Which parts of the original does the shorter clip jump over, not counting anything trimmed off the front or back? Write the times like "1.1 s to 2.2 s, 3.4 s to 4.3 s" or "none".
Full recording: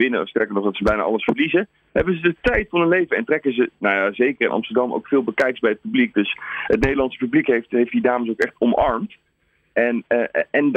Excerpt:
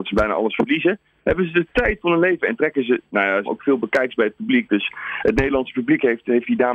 4.1 s to 4.9 s